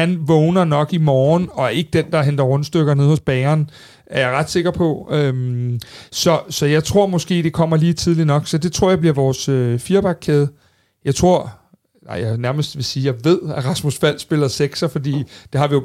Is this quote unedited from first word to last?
yes; 0 cuts

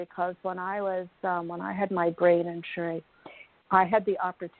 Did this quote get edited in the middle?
no; 0 cuts

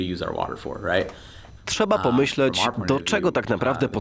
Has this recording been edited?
yes; 1 cut; at 1.6 s

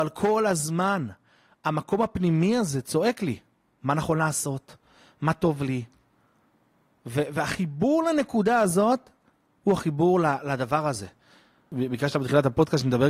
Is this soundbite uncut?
yes; 0 cuts

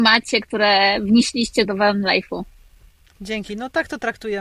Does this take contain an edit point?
yes; 1 cut; at 1.7 s

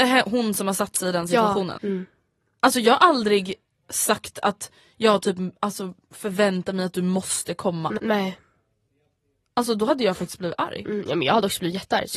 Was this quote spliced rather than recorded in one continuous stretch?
yes; 2 cuts; at 1.8 s, 8.0 s

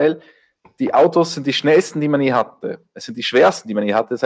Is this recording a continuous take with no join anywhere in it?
yes; 0 cuts

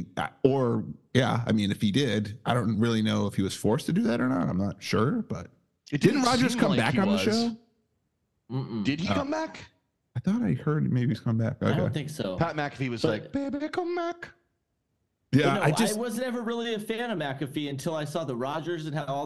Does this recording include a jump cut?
no; 0 cuts

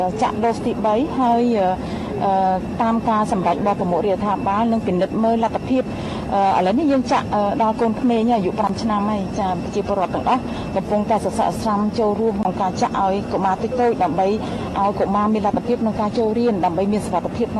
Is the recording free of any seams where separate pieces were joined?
yes; 0 cuts

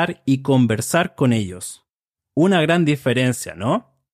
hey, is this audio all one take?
no; 1 cut; at 2.2 s

